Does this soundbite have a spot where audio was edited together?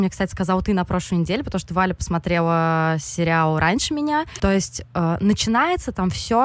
yes; 1 cut; at 4.4 s

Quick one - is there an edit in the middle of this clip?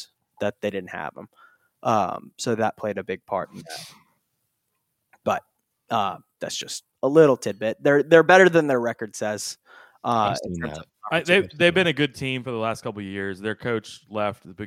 no; 0 cuts

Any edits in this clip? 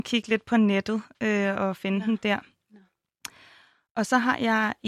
no; 0 cuts

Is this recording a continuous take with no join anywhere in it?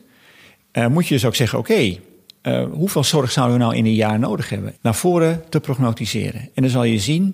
no; 1 cut; at 4.7 s

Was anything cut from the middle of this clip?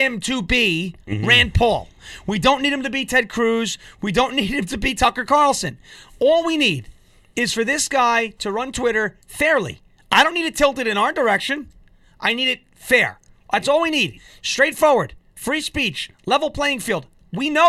no; 0 cuts

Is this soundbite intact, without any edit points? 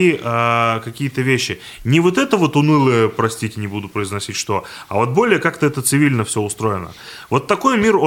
yes; 0 cuts

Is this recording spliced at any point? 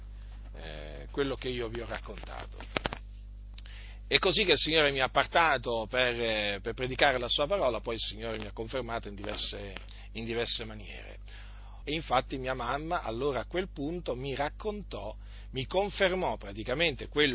yes; 1 cut; at 11.8 s

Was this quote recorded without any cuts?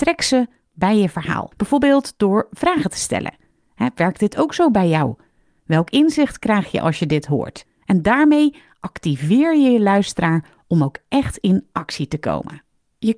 yes; 0 cuts

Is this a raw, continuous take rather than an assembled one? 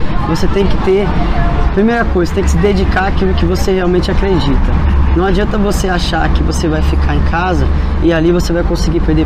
yes; 0 cuts

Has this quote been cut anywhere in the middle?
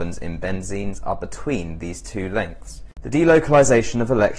yes; 1 cut; at 3.0 s

